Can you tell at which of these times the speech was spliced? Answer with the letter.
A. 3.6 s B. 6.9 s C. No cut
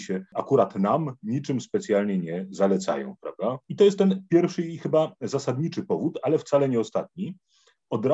C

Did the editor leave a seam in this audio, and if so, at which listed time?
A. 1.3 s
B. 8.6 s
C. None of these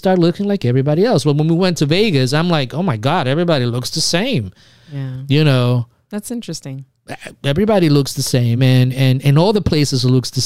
C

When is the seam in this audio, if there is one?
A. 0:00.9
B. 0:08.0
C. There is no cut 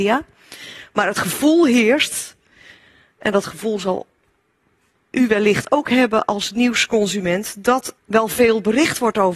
B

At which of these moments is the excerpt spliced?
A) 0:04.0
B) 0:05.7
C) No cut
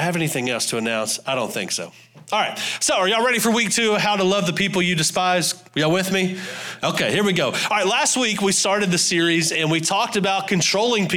B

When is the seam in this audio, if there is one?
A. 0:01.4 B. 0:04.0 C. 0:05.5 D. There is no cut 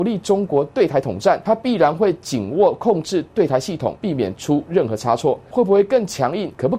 C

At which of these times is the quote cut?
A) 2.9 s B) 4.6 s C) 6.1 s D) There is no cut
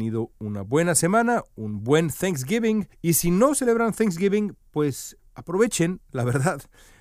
A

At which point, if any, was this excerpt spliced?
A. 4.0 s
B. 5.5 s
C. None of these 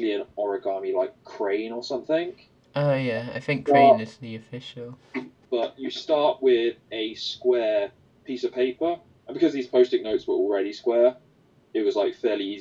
B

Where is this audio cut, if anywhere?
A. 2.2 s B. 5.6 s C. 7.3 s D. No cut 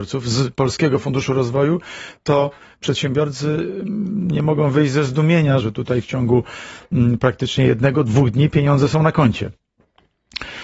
B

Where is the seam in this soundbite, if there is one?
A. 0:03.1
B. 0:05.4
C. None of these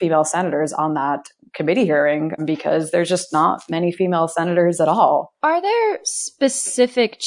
B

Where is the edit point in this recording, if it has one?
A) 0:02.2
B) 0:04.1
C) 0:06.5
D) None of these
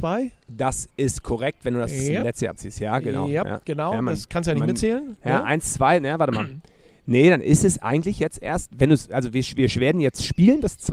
D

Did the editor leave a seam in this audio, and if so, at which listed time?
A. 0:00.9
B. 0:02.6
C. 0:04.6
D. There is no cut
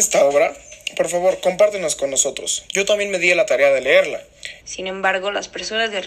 C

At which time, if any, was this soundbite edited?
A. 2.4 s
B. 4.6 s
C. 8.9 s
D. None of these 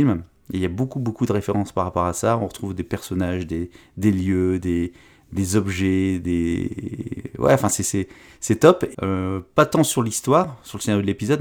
C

